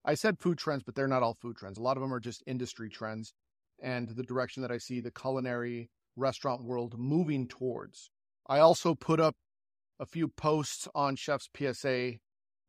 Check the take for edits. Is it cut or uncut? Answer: uncut